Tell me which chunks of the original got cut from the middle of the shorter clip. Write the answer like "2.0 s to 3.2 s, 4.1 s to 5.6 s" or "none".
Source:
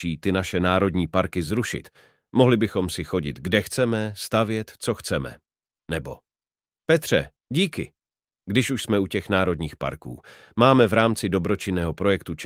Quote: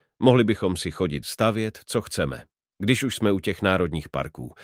3.4 s to 4.2 s, 5.7 s to 8.4 s